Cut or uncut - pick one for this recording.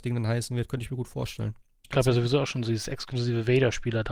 cut